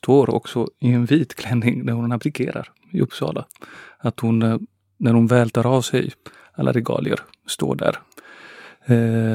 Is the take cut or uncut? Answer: uncut